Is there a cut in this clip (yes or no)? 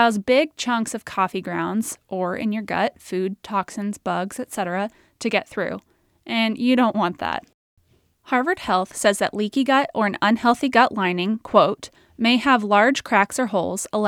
yes